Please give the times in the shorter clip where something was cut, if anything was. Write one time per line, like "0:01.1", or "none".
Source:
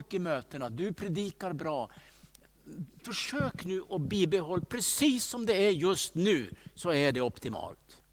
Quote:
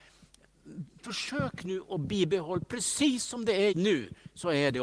0:03.7